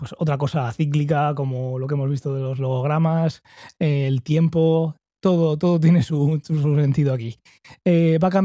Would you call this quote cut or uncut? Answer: uncut